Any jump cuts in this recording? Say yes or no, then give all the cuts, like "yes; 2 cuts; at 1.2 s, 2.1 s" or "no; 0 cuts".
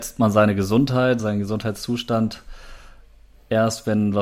no; 0 cuts